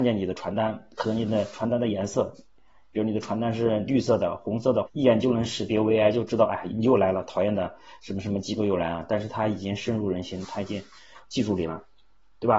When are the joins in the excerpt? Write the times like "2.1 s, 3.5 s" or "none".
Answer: 4.9 s